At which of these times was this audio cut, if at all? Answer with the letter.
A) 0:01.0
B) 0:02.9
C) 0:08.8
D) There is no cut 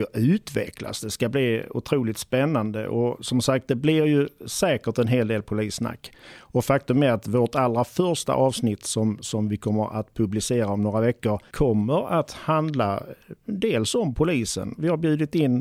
D